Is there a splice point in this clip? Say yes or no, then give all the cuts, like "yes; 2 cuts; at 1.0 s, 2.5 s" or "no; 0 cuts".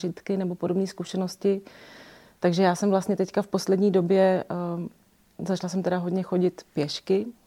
no; 0 cuts